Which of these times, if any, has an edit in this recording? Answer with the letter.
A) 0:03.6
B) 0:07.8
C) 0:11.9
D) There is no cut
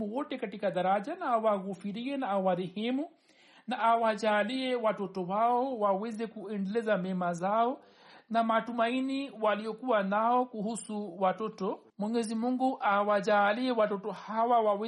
C